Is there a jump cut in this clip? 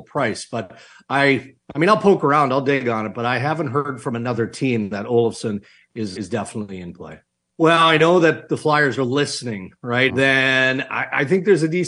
yes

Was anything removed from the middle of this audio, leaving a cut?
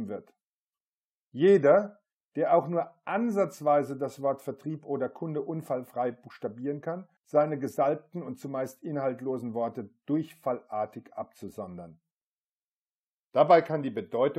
yes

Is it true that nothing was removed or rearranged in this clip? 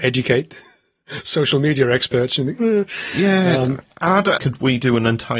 no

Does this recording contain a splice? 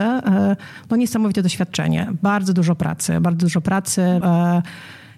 yes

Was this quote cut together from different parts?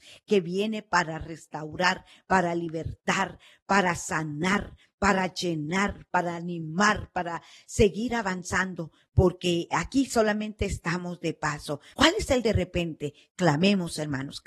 yes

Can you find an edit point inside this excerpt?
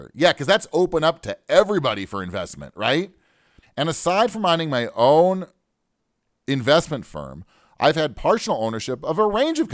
yes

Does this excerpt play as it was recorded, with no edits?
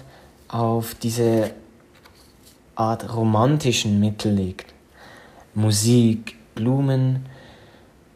no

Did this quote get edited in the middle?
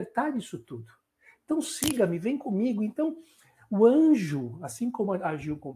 no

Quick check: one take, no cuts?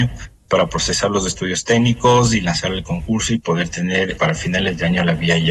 no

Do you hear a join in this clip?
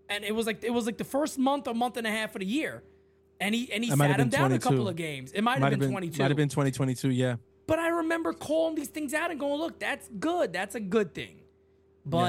no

